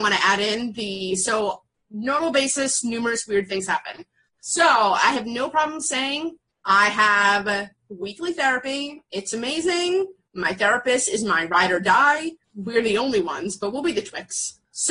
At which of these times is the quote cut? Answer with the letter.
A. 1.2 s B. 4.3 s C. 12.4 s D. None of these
C